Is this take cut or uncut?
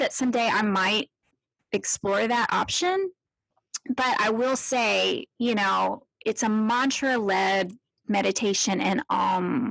uncut